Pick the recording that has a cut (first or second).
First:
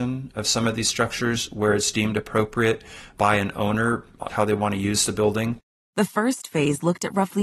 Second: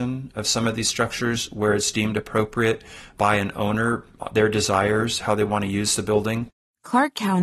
first